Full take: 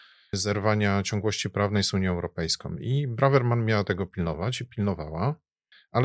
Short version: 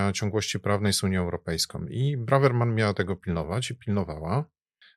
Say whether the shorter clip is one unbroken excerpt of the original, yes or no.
yes